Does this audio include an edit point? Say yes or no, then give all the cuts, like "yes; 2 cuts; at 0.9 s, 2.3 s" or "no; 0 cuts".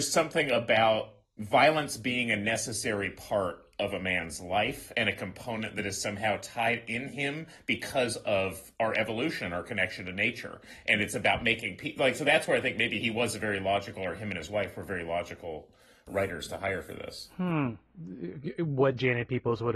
no; 0 cuts